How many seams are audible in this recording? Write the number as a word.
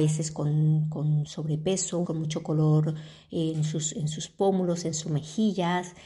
one